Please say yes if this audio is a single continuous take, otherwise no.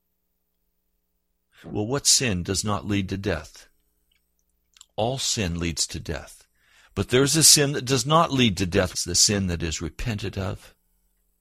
no